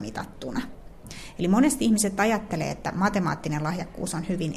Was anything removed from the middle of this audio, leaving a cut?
no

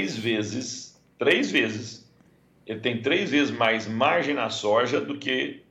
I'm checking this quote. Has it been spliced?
no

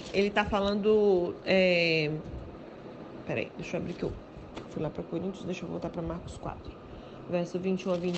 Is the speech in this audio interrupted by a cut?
no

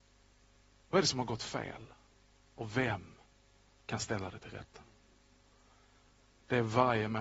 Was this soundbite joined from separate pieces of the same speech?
no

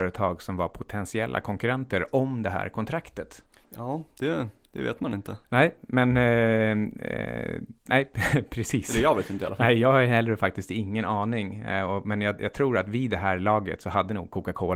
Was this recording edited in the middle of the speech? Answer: no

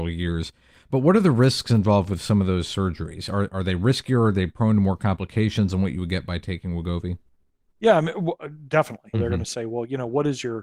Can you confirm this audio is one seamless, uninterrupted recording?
no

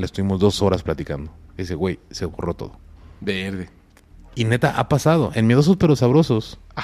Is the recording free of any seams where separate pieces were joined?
yes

